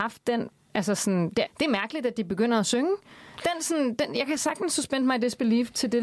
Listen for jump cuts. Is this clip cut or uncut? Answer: cut